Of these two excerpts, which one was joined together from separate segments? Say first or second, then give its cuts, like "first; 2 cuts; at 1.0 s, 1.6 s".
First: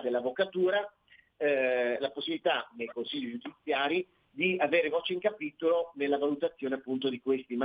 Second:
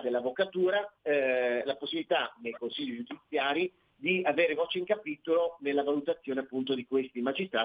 second; 1 cut; at 1.0 s